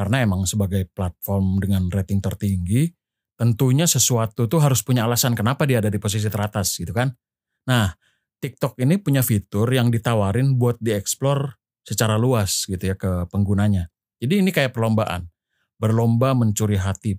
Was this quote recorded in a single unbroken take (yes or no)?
no